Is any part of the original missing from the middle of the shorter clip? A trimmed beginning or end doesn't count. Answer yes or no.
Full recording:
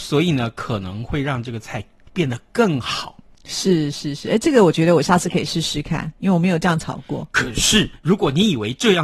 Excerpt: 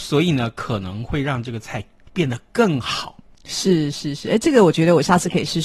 no